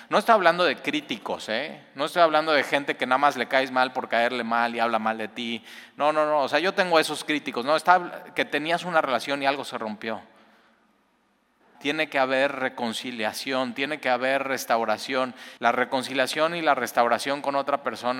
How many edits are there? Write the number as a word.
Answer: two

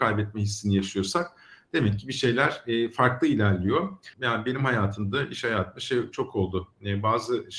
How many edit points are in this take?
one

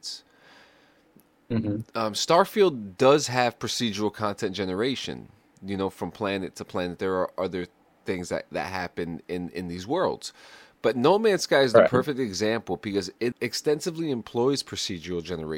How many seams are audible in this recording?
one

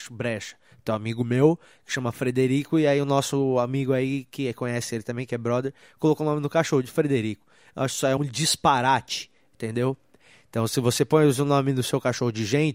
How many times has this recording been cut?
one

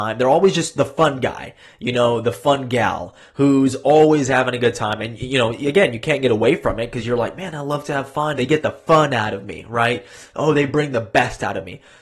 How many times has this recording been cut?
one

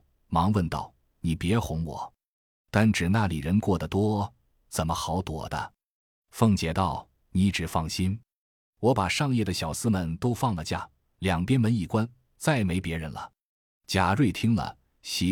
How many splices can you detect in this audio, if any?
zero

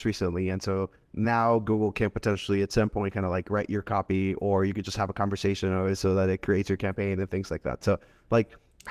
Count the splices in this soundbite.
zero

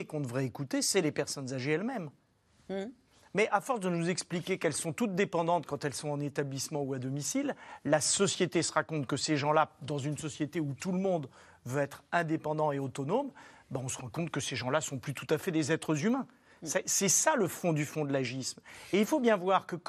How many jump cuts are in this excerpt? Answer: zero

